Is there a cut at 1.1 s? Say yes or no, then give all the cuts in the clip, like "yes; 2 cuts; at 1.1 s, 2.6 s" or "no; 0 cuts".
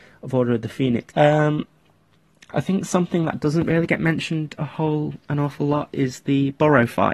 yes; 1 cut; at 1.1 s